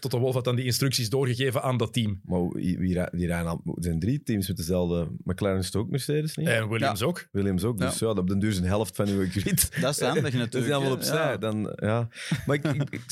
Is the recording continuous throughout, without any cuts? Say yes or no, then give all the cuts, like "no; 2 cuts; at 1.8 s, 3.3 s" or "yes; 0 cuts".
yes; 0 cuts